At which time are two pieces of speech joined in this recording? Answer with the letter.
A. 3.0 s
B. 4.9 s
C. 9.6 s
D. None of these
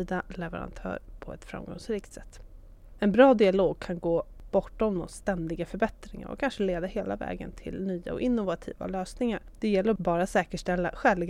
D